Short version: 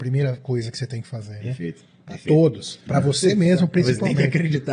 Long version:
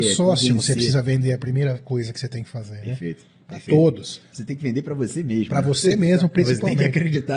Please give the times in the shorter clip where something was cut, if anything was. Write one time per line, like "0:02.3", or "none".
0:02.9